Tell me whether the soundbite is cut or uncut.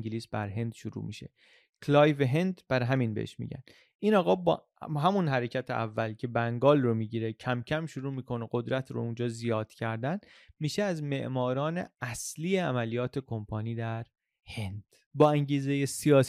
uncut